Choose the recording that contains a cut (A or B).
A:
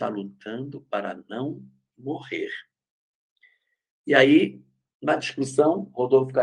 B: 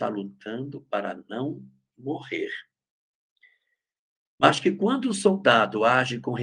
A